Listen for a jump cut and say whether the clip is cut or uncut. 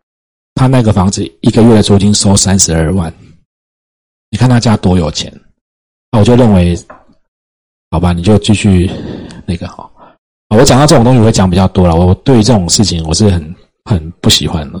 uncut